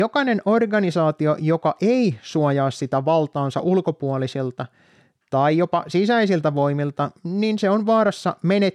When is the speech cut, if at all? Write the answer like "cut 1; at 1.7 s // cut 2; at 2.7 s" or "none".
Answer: none

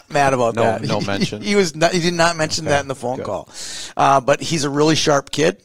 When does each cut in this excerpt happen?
none

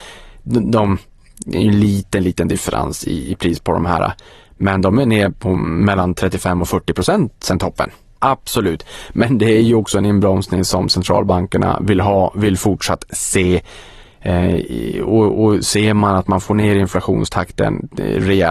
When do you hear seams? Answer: cut 1; at 8.2 s

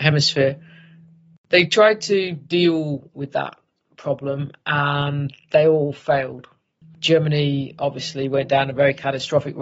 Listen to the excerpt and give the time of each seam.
cut 1; at 6.8 s

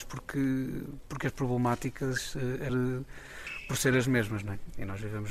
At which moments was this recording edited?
cut 1; at 2.7 s

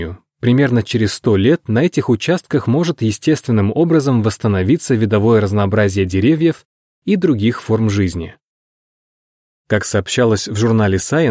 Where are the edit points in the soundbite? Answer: cut 1; at 9.6 s

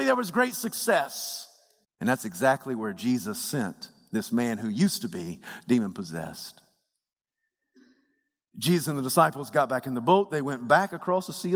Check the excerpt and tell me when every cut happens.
cut 1; at 1.8 s

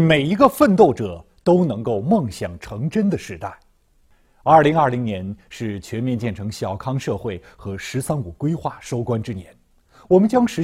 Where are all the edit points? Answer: none

